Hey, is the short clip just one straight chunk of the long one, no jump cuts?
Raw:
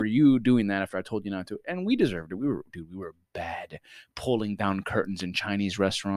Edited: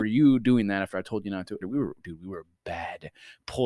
no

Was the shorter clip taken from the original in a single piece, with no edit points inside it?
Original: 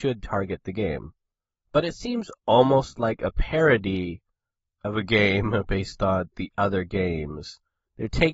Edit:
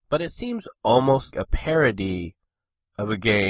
no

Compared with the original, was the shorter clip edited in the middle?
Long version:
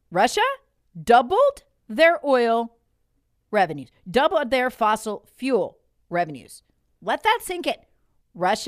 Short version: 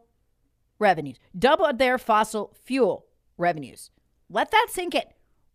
no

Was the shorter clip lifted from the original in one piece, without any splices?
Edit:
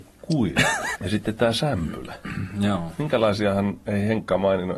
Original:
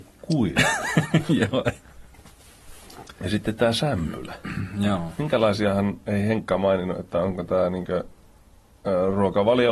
no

